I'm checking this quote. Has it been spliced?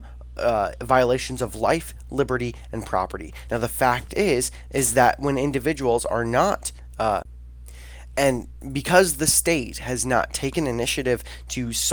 yes; 1 cut; at 3.5 s

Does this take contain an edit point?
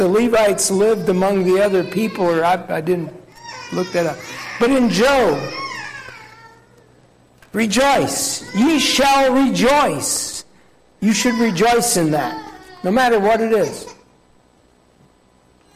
yes; 1 cut; at 11.0 s

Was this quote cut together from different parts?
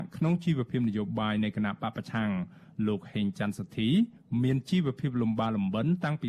no; 0 cuts

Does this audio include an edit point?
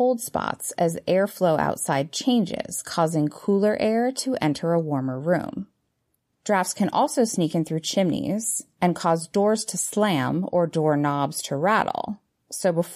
no; 0 cuts

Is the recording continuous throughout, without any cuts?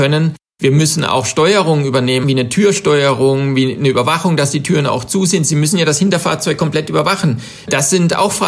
no; 1 cut; at 2.2 s

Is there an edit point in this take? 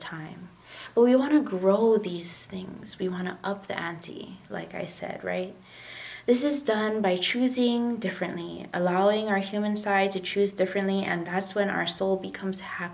no; 0 cuts

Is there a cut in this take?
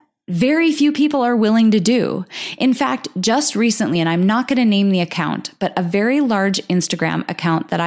no; 0 cuts

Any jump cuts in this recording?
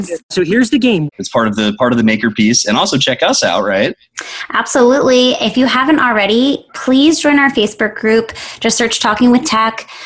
yes; 1 cut; at 1.1 s

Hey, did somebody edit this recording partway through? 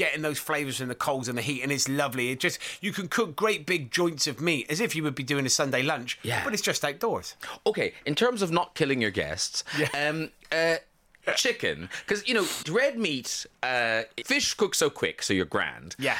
yes; 2 cuts; at 12.6 s, 14.2 s

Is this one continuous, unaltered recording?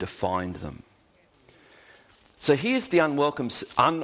no; 1 cut; at 2.4 s

